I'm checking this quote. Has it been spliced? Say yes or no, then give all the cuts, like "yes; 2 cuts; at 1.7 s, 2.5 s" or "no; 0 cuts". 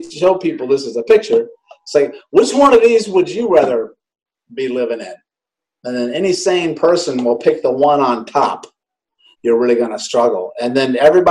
yes; 1 cut; at 9.3 s